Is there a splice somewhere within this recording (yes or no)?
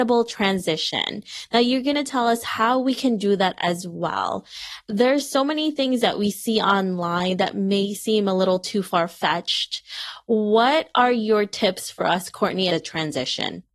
yes